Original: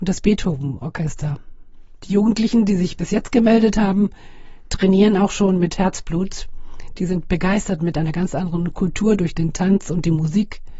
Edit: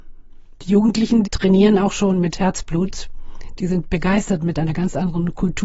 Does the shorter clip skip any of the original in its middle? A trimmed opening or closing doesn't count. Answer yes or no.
yes